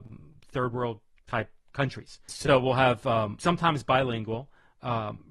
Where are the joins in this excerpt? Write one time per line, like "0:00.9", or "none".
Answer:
0:02.3
0:03.4